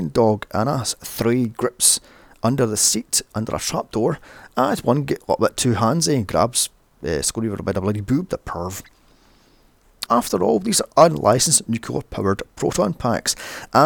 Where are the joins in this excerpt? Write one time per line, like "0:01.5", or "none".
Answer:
0:10.1